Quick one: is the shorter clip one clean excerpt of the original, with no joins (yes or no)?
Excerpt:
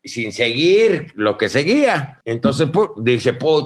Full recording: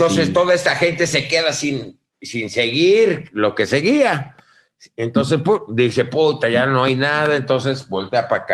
no